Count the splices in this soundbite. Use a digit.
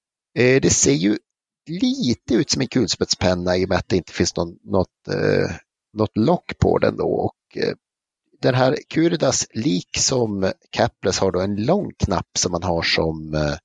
0